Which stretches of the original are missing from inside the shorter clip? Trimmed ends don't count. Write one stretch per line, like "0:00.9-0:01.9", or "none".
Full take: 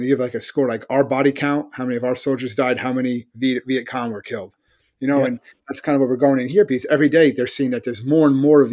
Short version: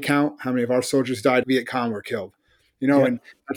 0:02.8-0:03.6